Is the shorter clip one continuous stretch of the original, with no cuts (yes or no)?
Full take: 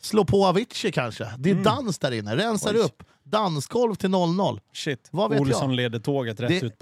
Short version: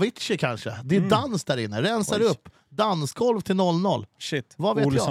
yes